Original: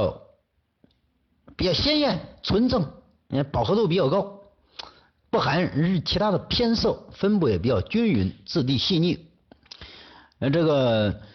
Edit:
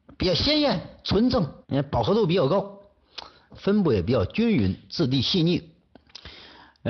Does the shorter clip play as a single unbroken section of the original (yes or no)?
no